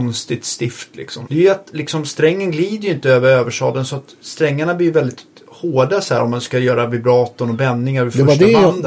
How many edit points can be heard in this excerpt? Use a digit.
1